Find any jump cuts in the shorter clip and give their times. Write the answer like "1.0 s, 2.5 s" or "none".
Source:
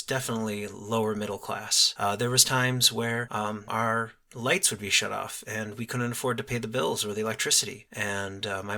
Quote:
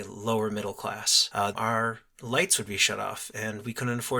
1.5 s